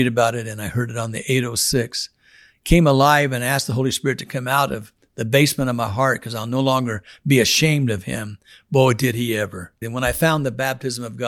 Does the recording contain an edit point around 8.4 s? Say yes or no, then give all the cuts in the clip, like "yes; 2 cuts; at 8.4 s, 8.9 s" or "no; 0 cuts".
no; 1 cut; at 9.8 s